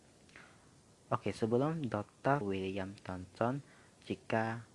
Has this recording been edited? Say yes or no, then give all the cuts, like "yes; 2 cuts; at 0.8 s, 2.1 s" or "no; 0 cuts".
yes; 1 cut; at 2.4 s